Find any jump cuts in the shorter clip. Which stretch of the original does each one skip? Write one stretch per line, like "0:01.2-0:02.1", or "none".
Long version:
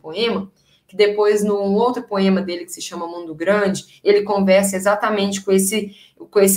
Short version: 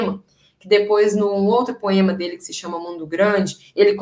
none